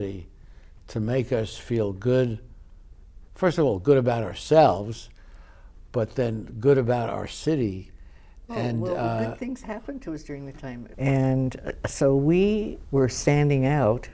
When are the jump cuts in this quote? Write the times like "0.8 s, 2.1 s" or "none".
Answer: 10.9 s, 12.8 s